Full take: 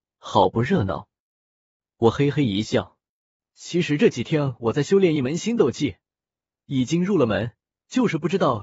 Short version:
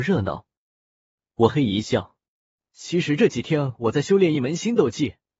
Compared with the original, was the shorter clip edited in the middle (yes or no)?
yes